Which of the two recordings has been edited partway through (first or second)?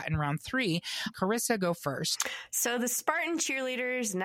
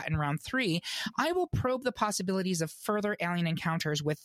first